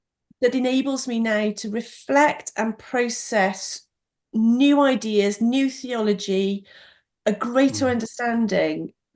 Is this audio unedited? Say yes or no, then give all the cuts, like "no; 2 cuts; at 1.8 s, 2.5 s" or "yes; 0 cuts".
yes; 0 cuts